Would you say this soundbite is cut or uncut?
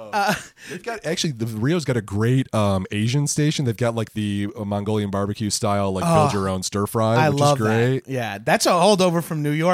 uncut